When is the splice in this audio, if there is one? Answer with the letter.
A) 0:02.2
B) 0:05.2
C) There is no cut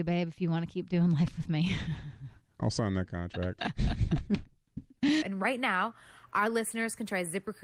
B